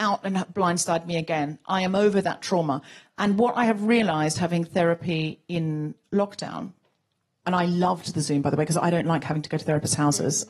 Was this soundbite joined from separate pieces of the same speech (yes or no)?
no